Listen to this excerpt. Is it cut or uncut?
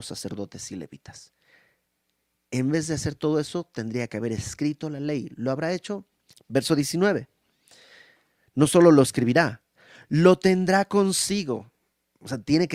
cut